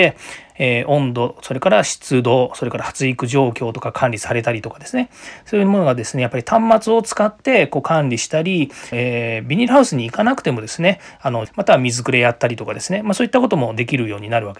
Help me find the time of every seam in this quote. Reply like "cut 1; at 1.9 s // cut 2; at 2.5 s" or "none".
cut 1; at 8.9 s // cut 2; at 11.5 s